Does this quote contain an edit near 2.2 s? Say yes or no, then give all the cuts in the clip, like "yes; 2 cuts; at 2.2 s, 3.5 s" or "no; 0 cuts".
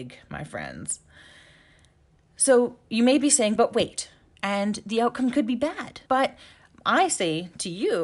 no; 2 cuts; at 4.3 s, 6.1 s